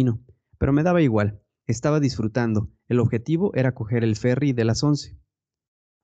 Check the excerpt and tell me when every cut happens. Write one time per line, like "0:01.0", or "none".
none